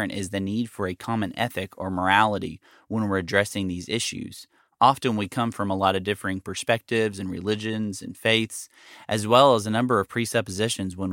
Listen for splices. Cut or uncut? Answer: uncut